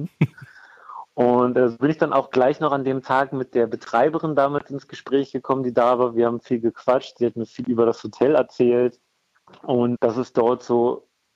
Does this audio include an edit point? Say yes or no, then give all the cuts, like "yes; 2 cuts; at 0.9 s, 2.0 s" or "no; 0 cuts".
yes; 1 cut; at 10.0 s